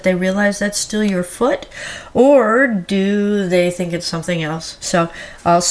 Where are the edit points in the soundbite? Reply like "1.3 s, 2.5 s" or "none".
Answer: none